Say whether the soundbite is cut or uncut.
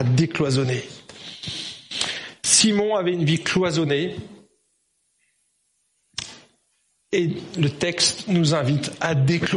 cut